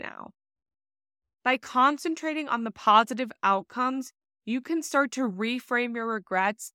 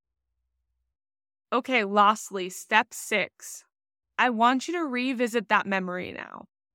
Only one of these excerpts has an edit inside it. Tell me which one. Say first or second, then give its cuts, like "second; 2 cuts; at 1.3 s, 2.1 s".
first; 1 cut; at 1.4 s